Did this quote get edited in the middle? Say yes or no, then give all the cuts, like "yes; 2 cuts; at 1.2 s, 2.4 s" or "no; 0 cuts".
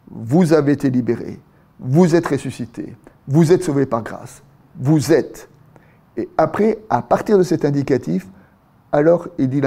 no; 0 cuts